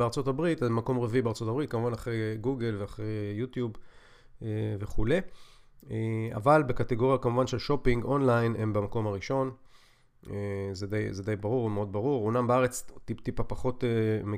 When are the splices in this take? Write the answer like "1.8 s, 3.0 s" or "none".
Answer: none